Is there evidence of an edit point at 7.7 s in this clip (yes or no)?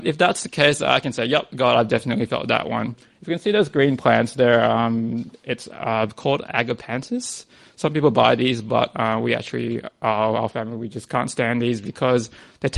no